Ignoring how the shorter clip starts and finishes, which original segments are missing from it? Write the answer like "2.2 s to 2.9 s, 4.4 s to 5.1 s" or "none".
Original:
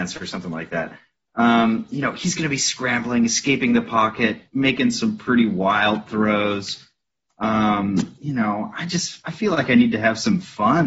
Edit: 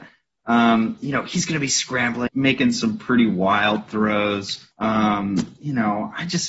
3.2 s to 4.5 s, 6.9 s to 7.3 s